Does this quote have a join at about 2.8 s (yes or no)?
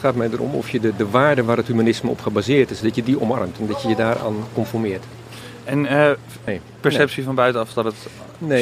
yes